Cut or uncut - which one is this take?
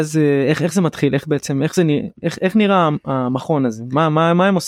uncut